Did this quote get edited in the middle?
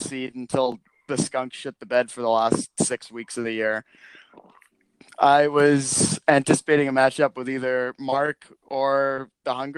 no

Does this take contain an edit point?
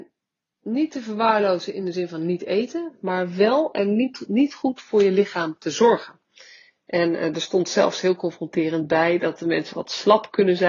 no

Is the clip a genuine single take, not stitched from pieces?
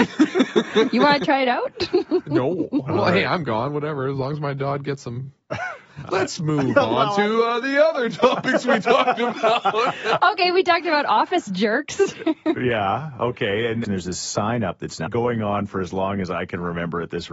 no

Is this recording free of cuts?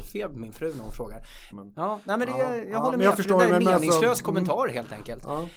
no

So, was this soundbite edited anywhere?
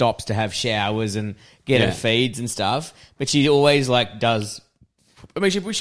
no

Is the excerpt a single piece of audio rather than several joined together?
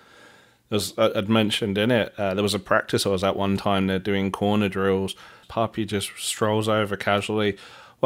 no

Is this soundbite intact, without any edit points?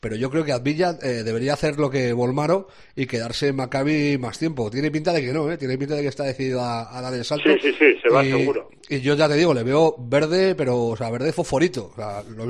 yes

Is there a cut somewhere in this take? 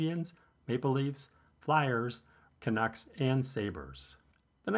yes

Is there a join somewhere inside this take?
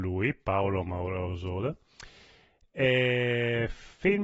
no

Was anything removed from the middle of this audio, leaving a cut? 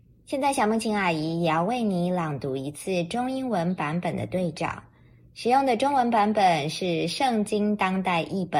no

